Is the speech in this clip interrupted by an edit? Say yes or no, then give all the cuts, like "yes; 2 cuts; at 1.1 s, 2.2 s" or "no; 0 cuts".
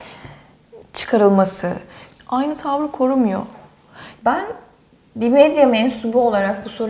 yes; 2 cuts; at 2.1 s, 4.2 s